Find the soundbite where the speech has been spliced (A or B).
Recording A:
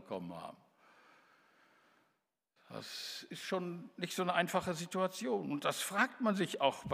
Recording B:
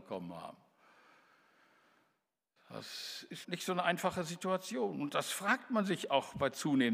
B